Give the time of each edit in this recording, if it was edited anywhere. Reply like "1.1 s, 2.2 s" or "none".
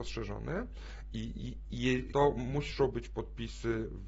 2.1 s